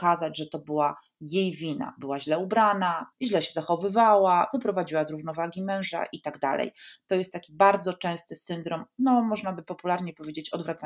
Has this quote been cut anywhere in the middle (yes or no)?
yes